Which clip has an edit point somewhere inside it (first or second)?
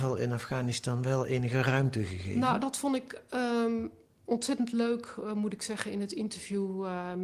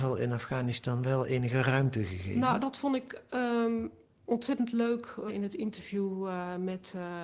second